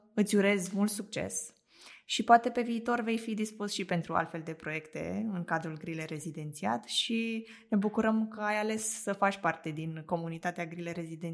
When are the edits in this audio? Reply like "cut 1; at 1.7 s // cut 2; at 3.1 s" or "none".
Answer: none